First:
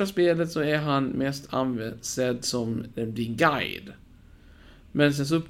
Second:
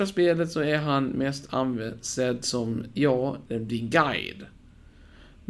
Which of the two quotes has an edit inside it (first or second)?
first